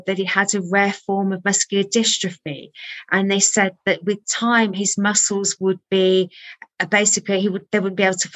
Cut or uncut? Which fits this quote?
uncut